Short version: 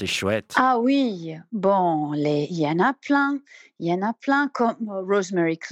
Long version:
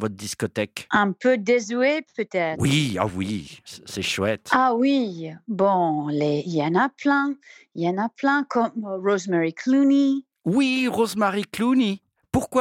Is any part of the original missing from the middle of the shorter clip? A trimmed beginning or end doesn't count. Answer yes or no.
no